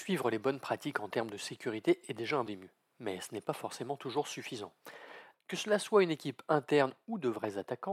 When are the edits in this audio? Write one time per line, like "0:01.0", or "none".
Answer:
0:02.5
0:05.3

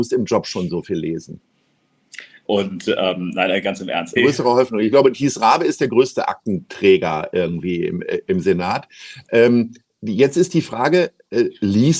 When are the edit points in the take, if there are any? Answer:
0:02.4
0:04.2

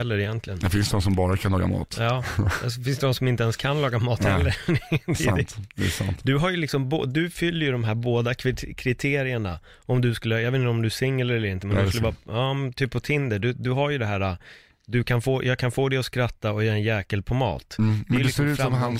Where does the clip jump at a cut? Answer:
none

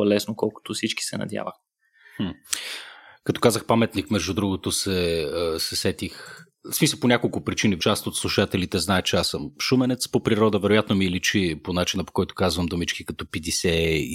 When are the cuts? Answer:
0:07.8

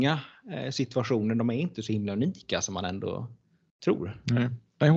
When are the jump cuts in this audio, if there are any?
none

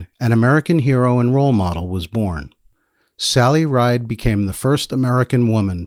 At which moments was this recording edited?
none

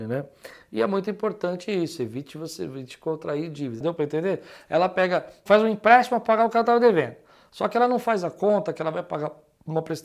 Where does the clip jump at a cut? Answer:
0:03.8
0:05.5

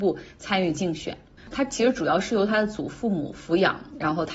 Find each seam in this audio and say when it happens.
0:01.4

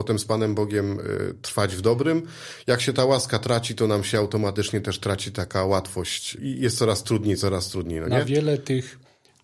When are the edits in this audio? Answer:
0:06.4

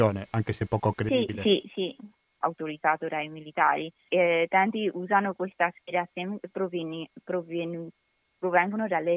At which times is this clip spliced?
0:02.4
0:04.1

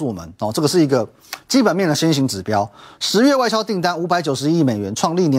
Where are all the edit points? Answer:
none

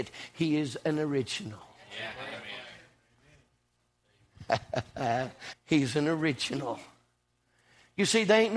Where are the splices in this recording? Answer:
0:05.5

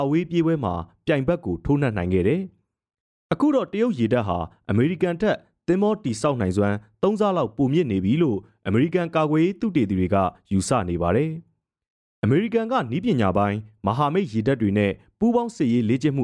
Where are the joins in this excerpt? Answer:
none

